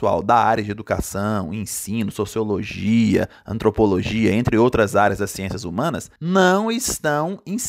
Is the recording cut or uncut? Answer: cut